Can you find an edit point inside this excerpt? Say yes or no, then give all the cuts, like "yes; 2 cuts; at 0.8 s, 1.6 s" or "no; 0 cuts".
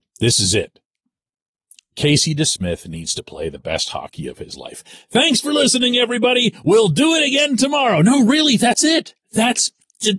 no; 0 cuts